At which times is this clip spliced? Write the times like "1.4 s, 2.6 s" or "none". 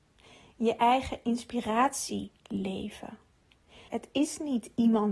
3.9 s